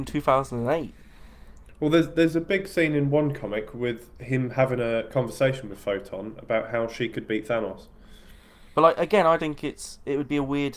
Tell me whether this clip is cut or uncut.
cut